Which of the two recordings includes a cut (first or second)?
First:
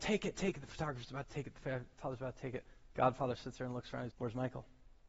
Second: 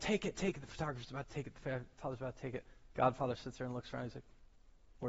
first